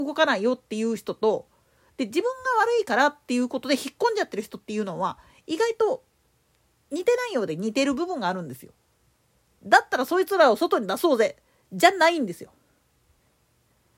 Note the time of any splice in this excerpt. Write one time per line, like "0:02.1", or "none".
none